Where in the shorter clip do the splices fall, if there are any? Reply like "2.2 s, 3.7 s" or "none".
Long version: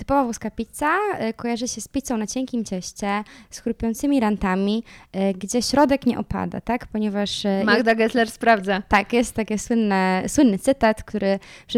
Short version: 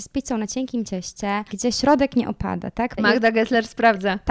1.5 s, 3.0 s